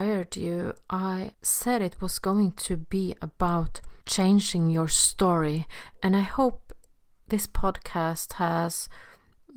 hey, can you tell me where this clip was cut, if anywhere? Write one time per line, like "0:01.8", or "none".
0:01.3
0:04.0